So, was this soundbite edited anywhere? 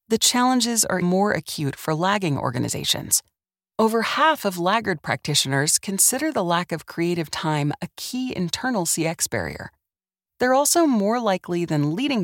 yes; 1 cut; at 1.0 s

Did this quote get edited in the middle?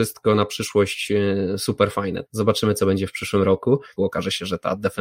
yes; 2 cuts; at 2.3 s, 4.0 s

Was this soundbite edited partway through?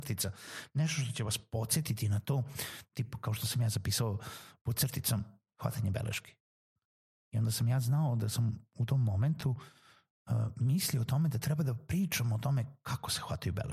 no; 0 cuts

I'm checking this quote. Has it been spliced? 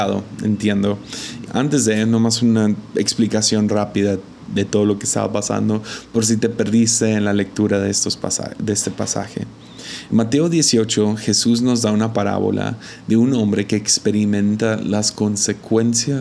yes; 1 cut; at 1.5 s

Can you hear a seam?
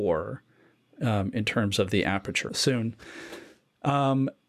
yes; 1 cut; at 2.5 s

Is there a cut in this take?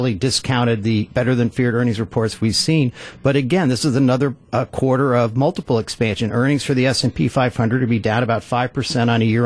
no; 0 cuts

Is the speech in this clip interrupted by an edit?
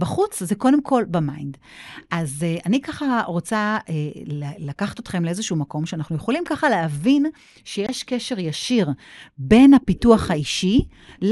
no; 0 cuts

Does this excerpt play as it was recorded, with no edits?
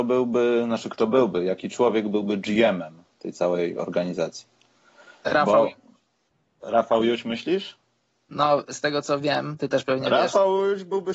yes; 0 cuts

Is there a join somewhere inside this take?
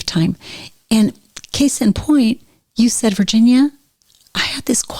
no; 0 cuts

